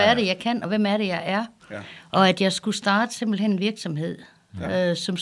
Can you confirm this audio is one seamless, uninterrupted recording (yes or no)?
no